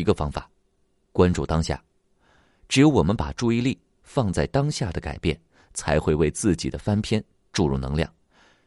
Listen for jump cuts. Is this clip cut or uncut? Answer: uncut